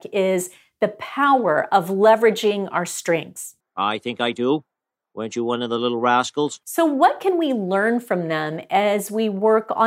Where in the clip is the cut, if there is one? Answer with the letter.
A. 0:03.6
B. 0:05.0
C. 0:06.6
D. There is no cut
A